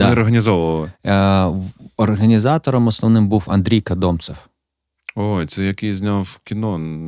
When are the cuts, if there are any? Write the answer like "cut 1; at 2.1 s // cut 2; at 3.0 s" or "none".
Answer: none